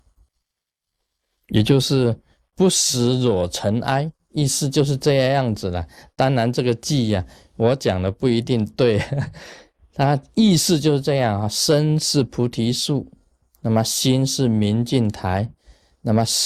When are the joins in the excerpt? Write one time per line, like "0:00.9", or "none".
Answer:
none